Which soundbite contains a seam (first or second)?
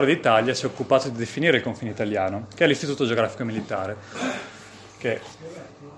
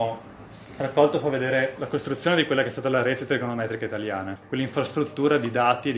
second